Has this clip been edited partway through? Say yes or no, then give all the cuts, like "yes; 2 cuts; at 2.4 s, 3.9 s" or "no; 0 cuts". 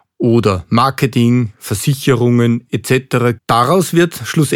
yes; 1 cut; at 3.4 s